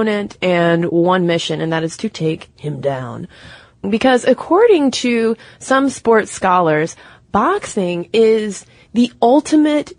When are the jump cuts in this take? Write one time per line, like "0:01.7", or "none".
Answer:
0:03.8